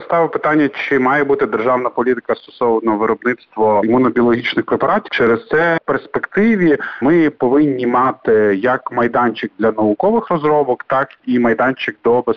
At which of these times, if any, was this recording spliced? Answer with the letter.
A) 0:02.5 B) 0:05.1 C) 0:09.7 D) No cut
B